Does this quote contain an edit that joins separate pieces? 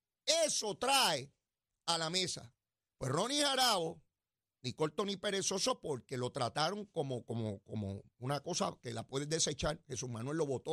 no; 0 cuts

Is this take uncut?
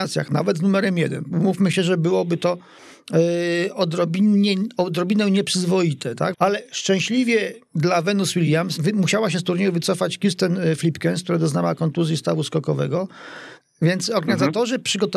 no; 3 cuts; at 6.3 s, 8.8 s, 13.6 s

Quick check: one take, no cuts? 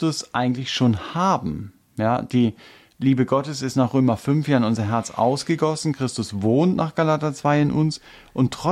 yes; 0 cuts

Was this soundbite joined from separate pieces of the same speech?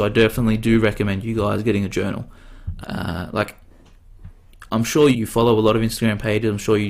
yes; 2 cuts; at 2.8 s, 5.1 s

